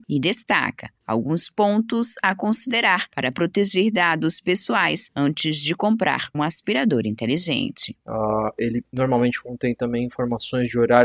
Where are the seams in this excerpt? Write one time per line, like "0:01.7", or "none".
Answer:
0:06.3
0:08.0